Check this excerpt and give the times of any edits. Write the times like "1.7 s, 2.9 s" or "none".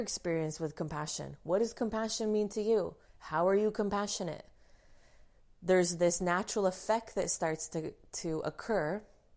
3.0 s